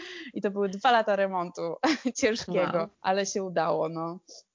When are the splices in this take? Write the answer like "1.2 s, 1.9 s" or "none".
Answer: 2.9 s